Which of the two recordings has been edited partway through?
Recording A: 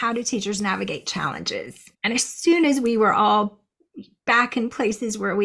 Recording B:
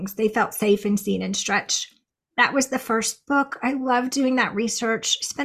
A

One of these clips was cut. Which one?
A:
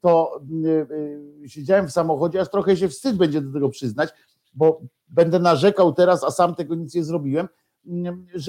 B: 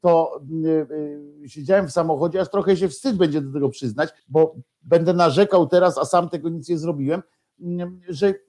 B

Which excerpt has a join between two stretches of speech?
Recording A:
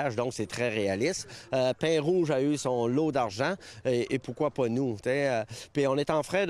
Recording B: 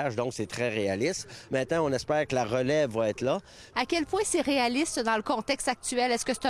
B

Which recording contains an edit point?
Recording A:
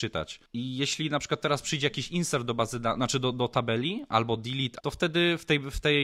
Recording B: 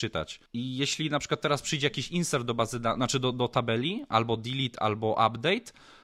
A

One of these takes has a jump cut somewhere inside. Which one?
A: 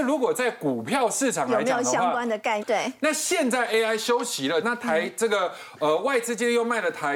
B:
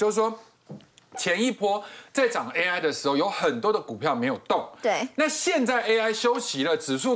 A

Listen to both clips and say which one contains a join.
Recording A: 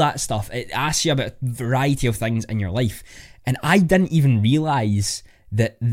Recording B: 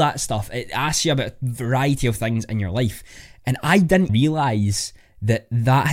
B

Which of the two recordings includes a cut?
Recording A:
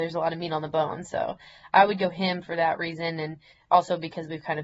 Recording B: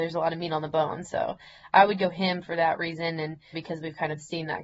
B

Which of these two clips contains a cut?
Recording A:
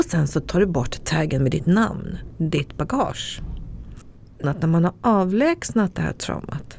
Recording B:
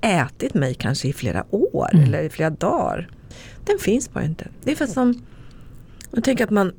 A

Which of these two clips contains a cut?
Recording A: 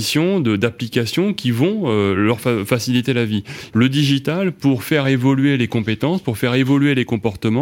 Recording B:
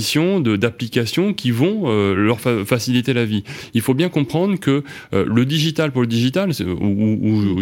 A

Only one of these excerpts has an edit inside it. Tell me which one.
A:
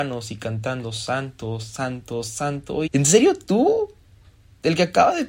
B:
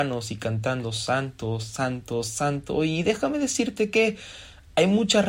A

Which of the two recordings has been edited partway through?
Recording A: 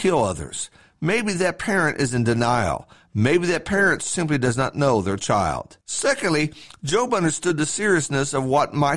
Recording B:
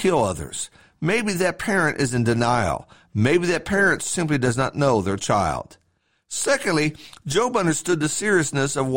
A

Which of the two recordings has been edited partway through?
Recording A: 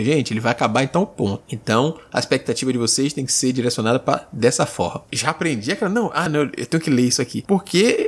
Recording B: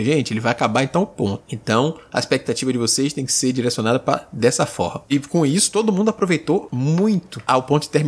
A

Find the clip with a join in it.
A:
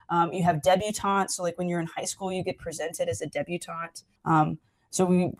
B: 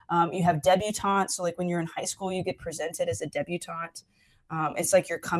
A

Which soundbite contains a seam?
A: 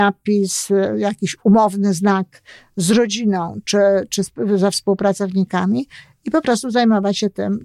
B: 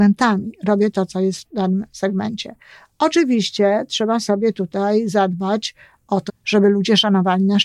B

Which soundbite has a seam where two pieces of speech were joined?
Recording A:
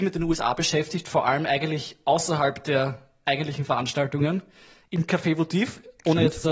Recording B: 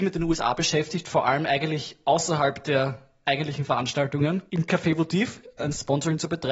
B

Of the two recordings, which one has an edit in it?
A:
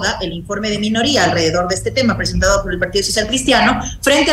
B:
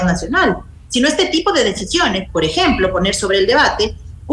B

